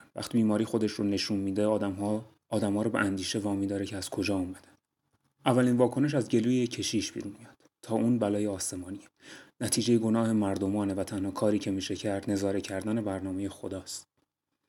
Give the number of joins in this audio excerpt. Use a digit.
0